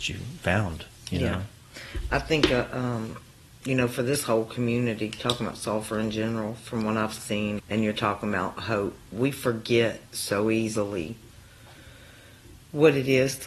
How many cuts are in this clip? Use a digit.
2